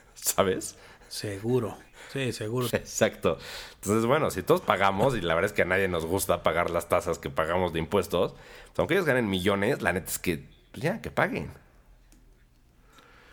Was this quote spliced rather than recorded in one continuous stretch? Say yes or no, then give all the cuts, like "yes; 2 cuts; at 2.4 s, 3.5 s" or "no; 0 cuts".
yes; 1 cut; at 2.7 s